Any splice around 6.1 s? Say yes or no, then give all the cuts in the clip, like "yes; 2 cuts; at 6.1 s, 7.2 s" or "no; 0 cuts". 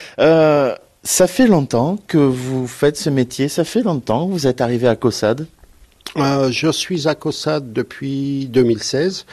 no; 0 cuts